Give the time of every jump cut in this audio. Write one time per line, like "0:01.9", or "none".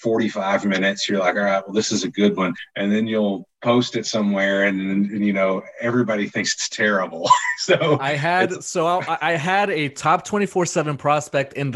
none